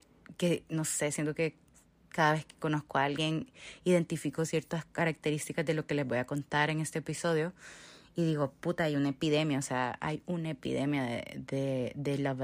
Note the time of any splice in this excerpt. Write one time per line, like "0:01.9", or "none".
none